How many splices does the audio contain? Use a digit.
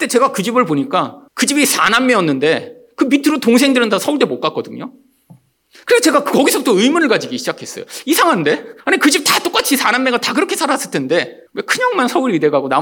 3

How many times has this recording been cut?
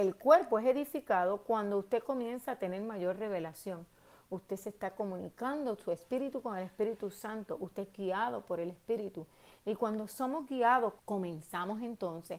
1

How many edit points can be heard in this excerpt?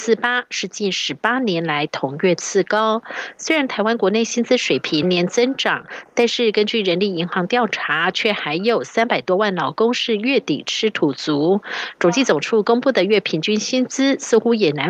1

